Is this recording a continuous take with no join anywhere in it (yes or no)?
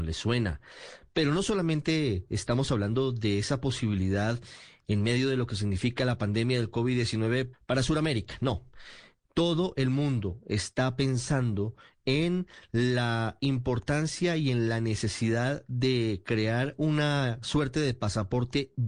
no